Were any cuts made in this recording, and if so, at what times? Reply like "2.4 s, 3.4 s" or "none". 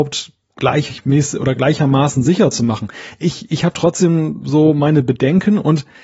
none